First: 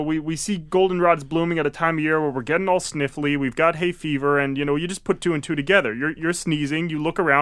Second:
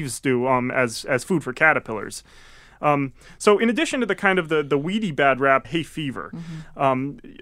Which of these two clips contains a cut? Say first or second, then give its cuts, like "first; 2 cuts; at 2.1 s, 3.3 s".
second; 1 cut; at 5.6 s